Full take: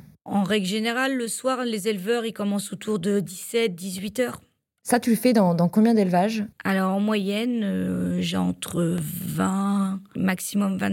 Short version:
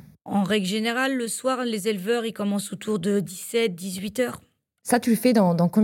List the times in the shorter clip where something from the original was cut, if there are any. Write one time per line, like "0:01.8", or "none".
none

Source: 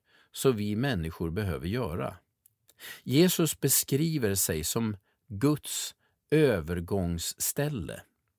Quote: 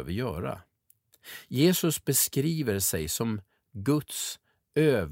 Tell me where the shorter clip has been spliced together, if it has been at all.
none

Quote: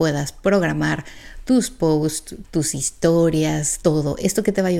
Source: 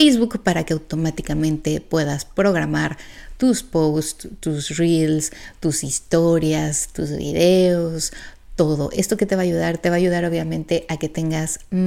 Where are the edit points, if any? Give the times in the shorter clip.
0:02.4
0:03.8

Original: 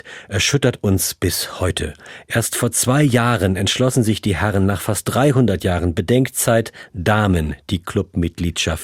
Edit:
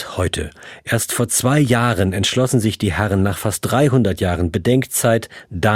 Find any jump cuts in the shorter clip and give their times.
none

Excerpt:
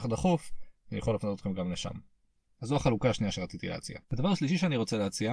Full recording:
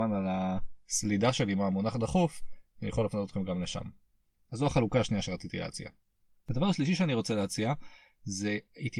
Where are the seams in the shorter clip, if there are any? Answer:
0:04.0

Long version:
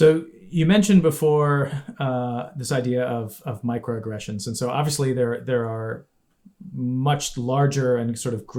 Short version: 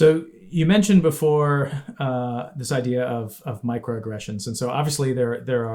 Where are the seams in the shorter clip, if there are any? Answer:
none

